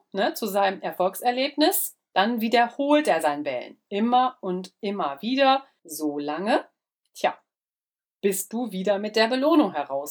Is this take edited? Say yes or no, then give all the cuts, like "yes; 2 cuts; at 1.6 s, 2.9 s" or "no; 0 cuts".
no; 0 cuts